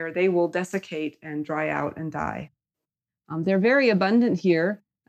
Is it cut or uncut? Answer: cut